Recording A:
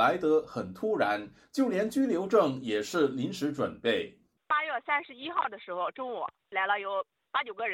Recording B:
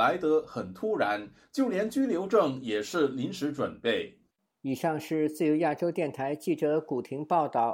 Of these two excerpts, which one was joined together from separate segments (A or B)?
B